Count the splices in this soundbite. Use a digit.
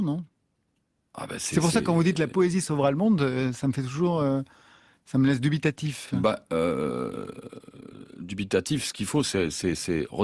0